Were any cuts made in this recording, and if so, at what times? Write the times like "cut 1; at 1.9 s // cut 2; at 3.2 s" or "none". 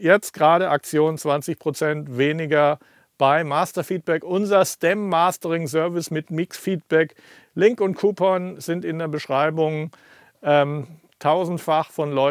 none